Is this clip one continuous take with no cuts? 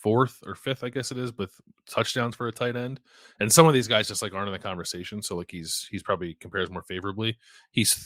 yes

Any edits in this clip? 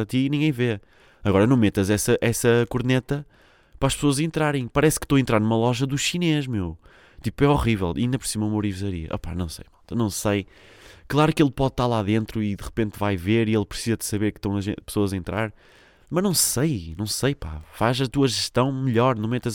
no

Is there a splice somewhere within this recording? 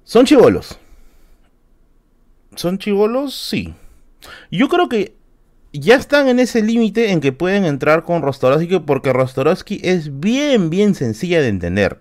no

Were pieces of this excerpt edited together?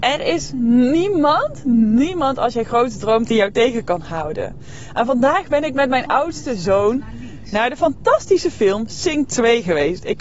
no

